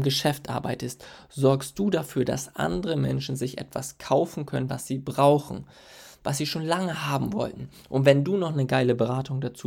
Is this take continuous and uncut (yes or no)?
no